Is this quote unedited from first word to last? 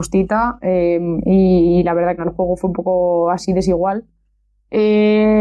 no; 1 cut; at 2.2 s

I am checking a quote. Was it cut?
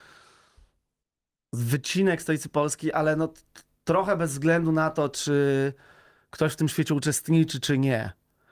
no; 0 cuts

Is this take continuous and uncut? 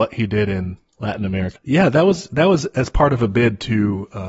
no; 1 cut; at 1.5 s

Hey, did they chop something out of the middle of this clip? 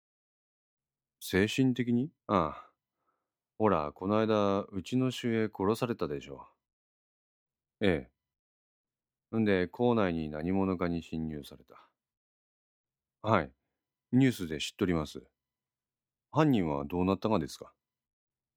yes; 1 cut; at 2.2 s

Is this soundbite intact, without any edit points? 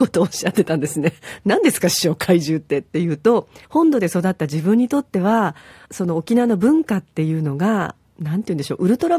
no; 2 cuts; at 3.6 s, 5.9 s

